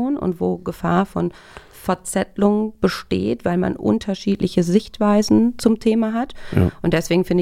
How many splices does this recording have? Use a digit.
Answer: 0